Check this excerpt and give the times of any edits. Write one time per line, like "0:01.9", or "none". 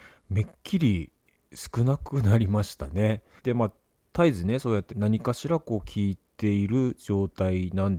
0:03.4
0:04.9